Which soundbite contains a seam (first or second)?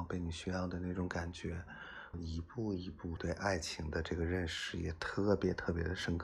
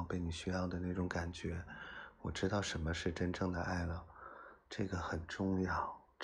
first